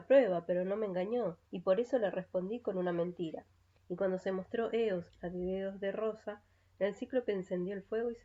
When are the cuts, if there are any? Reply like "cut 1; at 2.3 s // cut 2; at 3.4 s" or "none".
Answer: cut 1; at 1.5 s // cut 2; at 3.8 s